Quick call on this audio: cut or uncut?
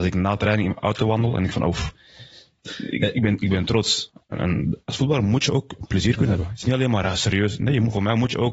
uncut